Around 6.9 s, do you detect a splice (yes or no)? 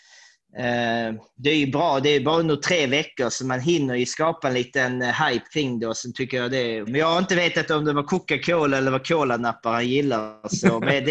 yes